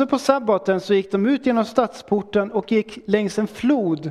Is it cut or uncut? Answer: uncut